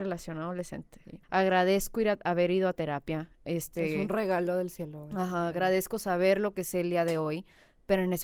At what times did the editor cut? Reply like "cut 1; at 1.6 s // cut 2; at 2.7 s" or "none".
cut 1; at 1.2 s